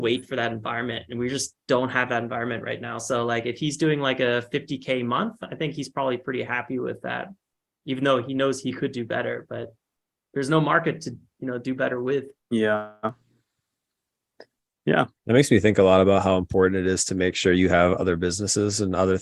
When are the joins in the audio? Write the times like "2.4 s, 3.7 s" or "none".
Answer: 12.4 s, 15.2 s